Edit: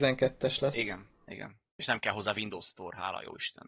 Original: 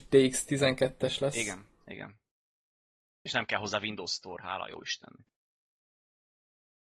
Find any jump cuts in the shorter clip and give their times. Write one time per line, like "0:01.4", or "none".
0:01.7